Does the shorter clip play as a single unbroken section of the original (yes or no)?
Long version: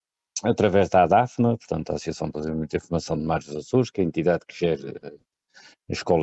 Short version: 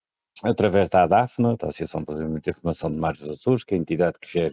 no